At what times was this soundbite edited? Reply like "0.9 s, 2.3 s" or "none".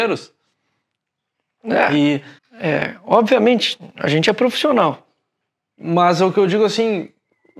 2.4 s, 5.7 s